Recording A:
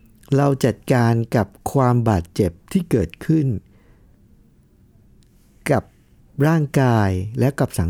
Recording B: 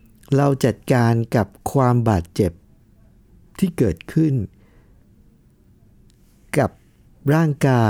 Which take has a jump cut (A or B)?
A